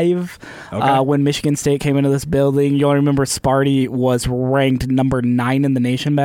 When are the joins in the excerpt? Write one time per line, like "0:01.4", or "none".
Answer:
none